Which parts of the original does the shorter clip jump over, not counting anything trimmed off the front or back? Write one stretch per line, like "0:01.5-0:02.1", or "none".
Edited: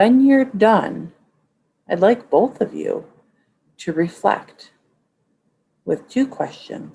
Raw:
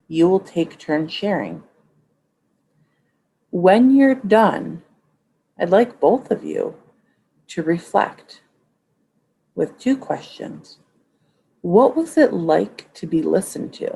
none